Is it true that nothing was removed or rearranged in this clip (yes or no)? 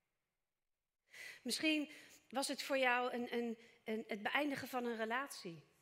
yes